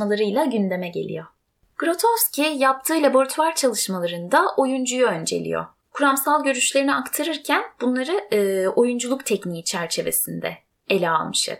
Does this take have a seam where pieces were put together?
yes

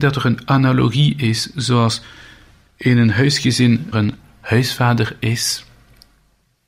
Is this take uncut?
no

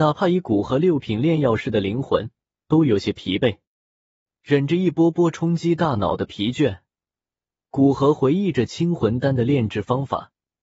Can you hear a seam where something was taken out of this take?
no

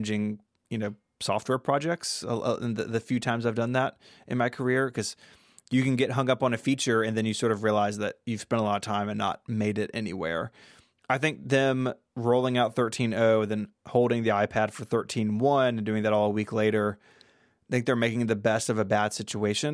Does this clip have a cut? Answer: no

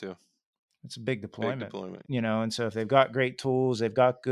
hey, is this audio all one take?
no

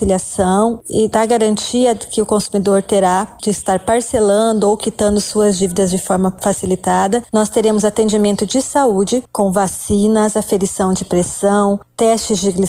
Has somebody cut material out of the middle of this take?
no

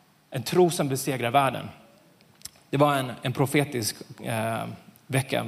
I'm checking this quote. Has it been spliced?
no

